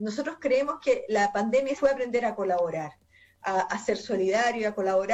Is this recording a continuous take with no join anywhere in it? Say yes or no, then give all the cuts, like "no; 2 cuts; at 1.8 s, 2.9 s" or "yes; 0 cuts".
no; 1 cut; at 1.8 s